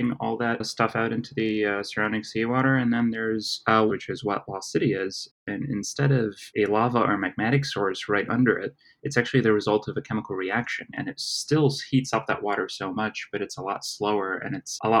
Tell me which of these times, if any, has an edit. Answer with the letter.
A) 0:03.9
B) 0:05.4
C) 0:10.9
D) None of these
A